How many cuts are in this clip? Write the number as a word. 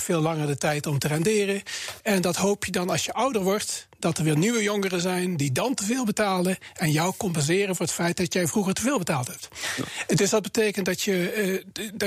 one